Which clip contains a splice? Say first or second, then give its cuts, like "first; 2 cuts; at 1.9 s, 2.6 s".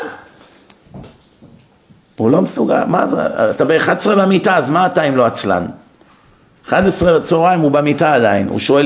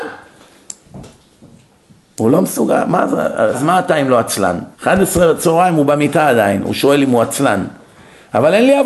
second; 2 cuts; at 3.5 s, 4.7 s